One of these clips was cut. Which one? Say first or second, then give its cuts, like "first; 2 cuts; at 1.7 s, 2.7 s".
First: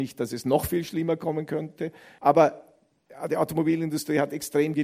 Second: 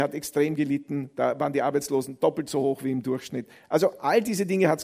first; 1 cut; at 2.2 s